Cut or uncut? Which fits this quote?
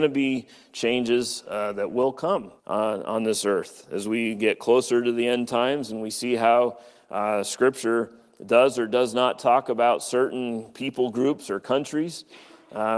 cut